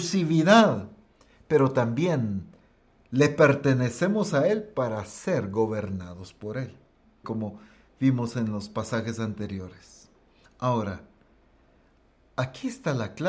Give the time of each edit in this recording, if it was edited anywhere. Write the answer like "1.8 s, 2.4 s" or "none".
7.2 s